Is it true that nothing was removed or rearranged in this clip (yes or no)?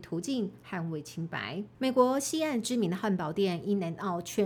no